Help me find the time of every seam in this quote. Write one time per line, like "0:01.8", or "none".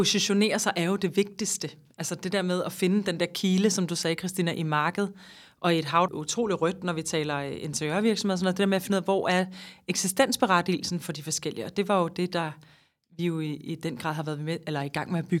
0:06.1